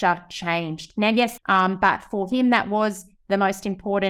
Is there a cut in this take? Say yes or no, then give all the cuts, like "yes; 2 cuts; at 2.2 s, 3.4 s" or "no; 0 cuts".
yes; 1 cut; at 1.4 s